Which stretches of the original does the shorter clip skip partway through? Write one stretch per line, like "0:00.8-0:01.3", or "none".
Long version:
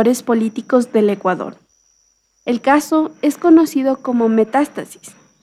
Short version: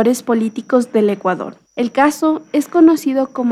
0:01.7-0:02.4